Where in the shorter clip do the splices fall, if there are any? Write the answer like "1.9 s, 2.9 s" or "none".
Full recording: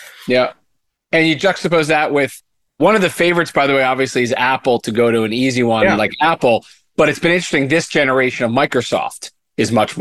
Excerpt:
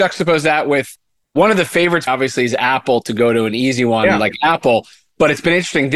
2.1 s